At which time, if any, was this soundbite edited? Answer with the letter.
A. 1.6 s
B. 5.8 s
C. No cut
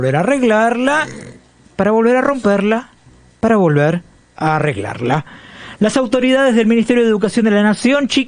B